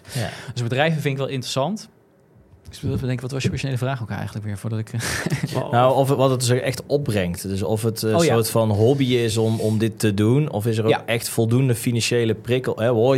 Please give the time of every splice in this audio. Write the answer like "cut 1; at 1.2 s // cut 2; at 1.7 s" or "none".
none